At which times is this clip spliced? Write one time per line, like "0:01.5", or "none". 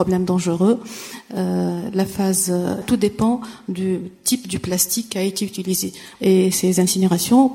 0:02.8
0:06.2

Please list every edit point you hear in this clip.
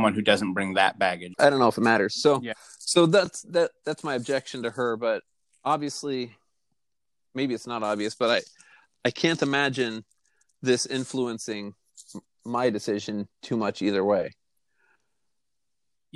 0:01.3

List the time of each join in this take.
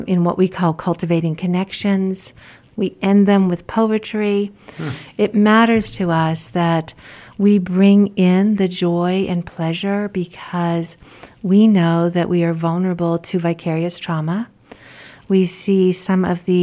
0:02.7

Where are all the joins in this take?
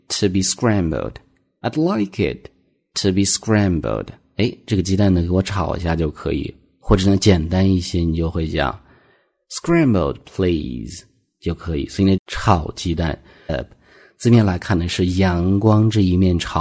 0:12.2
0:13.5

